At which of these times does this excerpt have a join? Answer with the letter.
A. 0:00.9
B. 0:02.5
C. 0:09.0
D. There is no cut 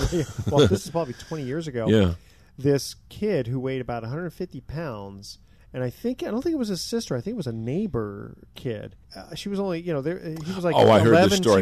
C